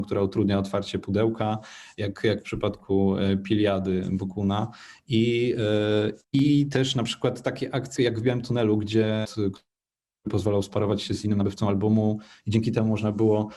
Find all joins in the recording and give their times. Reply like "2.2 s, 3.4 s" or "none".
6.2 s, 8.0 s, 9.2 s